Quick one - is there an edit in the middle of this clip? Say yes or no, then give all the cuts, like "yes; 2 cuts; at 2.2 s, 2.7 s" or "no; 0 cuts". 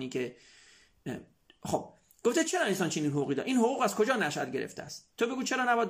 no; 0 cuts